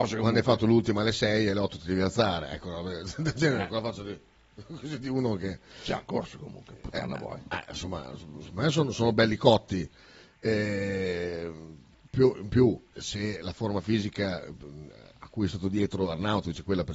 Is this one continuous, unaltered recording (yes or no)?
no